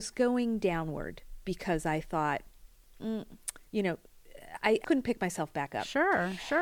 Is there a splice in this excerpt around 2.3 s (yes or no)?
no